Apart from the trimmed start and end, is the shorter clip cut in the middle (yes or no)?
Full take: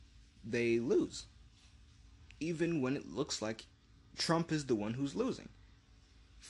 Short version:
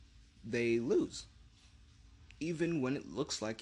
no